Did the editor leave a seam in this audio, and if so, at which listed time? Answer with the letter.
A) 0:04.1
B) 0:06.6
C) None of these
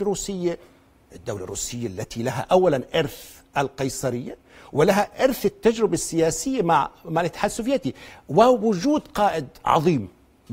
C